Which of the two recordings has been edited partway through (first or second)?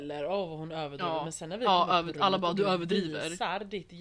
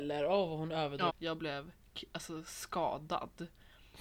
second